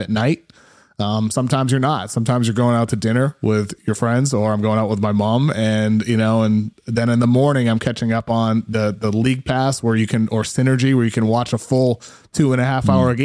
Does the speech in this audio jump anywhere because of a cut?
no; 0 cuts

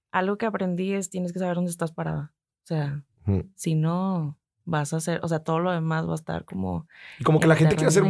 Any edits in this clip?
no; 0 cuts

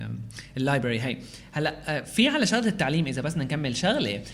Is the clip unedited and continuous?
yes; 0 cuts

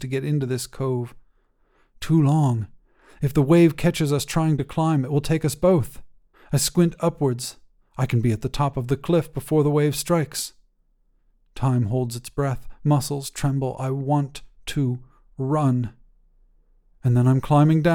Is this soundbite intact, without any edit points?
no; 1 cut; at 6.3 s

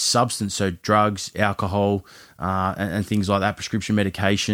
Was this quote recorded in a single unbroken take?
yes; 0 cuts

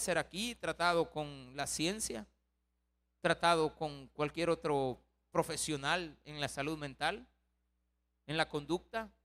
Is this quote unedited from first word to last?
yes; 0 cuts

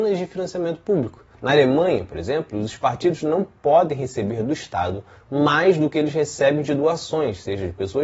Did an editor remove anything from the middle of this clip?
yes; 1 cut; at 1.3 s

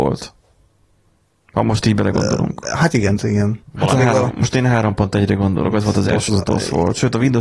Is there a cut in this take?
yes; 2 cuts; at 3.2 s, 6.3 s

